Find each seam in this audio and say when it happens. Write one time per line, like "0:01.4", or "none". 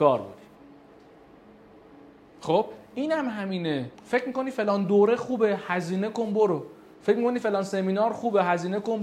0:03.9